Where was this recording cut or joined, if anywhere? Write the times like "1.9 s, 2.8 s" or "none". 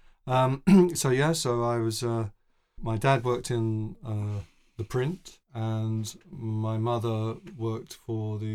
2.8 s, 5.4 s